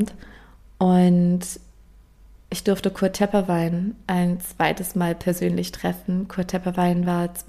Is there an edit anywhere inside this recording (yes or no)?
no